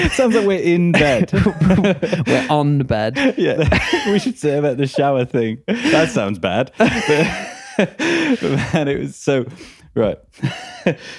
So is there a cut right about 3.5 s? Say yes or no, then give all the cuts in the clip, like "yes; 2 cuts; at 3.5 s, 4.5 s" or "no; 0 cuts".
yes; 1 cut; at 3.5 s